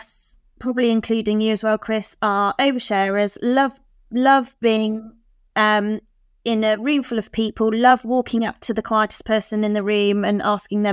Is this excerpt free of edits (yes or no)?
yes